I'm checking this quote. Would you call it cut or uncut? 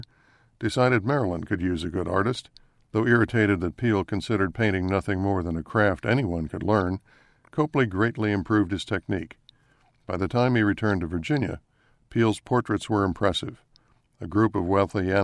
cut